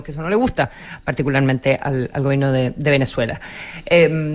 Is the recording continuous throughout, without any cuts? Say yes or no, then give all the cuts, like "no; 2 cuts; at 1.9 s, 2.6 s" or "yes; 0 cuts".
yes; 0 cuts